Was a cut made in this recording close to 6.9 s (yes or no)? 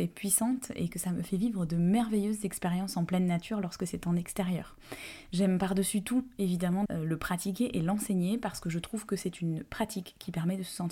yes